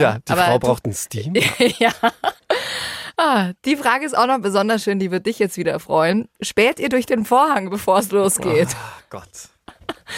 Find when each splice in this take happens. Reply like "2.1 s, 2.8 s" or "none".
none